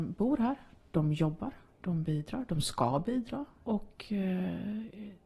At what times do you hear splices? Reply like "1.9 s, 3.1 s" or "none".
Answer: 3.6 s